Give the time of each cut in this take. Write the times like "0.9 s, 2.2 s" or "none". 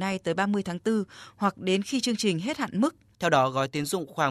3.1 s